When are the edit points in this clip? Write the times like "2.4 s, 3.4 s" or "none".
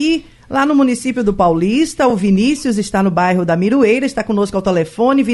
none